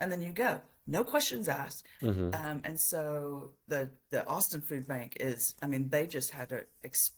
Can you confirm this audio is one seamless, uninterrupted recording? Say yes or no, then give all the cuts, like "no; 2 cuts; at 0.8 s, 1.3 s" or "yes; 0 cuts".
no; 1 cut; at 2.0 s